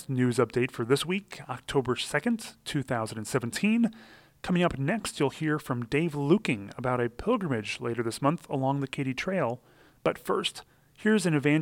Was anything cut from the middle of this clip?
no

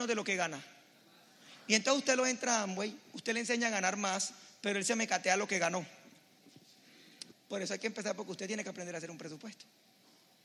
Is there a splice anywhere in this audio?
yes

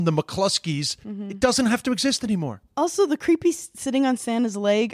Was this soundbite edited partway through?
no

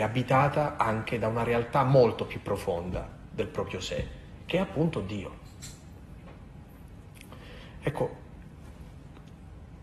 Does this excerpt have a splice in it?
no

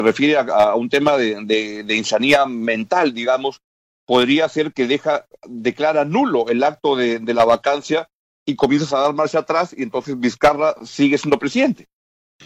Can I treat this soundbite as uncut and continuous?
yes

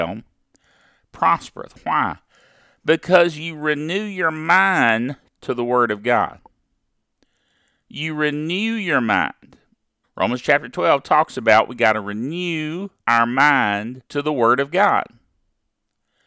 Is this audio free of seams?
no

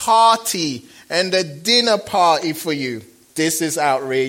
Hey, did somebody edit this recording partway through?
yes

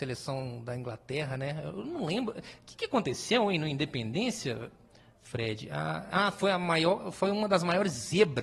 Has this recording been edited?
no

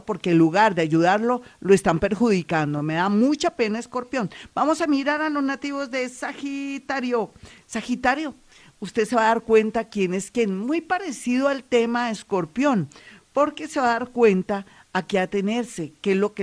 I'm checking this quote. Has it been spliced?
no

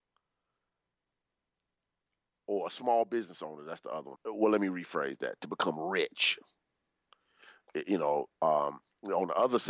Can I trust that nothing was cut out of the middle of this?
no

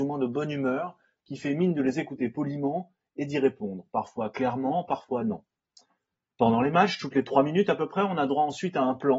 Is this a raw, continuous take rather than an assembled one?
yes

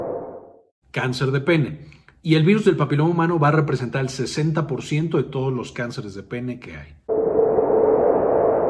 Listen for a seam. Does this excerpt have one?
yes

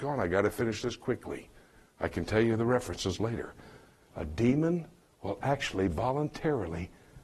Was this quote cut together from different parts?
no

